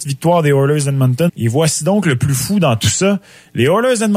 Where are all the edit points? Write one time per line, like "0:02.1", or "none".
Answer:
0:01.3